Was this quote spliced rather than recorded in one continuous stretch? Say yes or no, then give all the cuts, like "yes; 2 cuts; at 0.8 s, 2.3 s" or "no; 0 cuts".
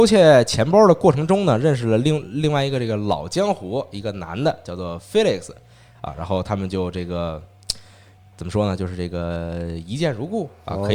no; 0 cuts